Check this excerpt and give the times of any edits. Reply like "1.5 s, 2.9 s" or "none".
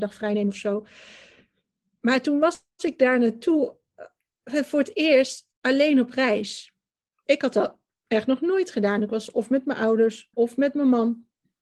5.5 s, 10.3 s